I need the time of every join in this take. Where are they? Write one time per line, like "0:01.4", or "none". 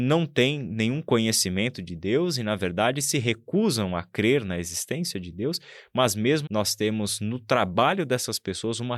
0:06.5